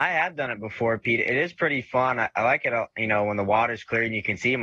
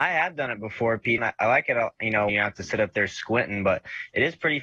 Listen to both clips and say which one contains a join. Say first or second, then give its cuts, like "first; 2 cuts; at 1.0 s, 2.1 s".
second; 2 cuts; at 1.2 s, 2.3 s